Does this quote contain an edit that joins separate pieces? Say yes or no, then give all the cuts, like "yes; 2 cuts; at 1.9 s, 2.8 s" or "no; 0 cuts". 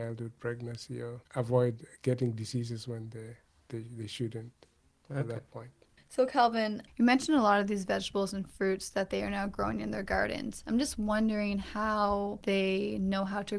no; 0 cuts